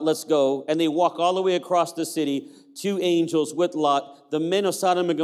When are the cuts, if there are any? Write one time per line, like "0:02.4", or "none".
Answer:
none